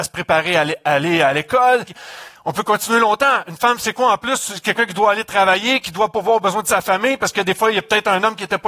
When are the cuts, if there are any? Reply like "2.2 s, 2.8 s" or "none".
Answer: 1.8 s

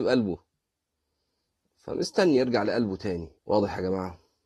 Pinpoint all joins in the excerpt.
3.4 s

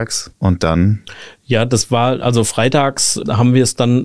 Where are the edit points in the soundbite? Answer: none

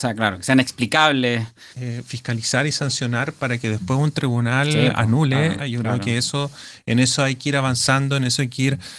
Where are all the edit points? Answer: 1.7 s, 5.6 s

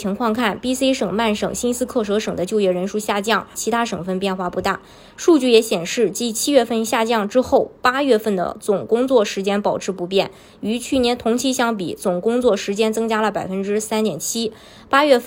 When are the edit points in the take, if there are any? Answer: 3.5 s

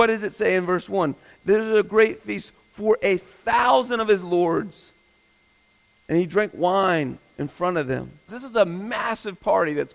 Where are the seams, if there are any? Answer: 8.3 s

